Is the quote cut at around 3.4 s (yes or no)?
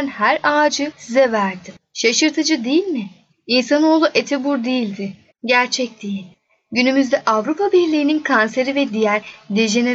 no